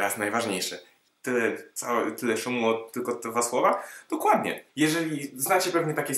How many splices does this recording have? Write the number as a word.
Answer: two